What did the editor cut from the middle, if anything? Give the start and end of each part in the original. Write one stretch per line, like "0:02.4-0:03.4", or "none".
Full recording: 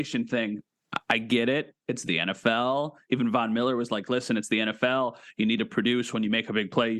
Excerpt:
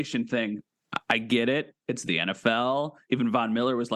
none